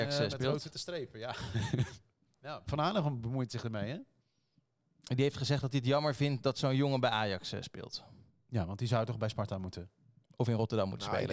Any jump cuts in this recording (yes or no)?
no